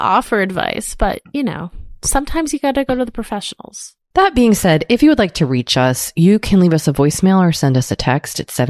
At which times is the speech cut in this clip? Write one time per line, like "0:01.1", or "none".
0:04.1